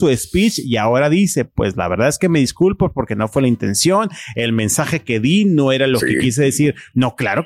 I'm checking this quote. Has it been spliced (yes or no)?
no